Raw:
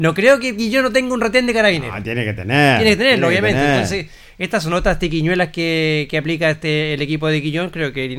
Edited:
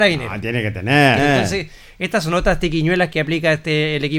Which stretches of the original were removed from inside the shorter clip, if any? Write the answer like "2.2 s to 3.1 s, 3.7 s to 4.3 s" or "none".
2.8 s to 3.6 s, 5.5 s to 6.1 s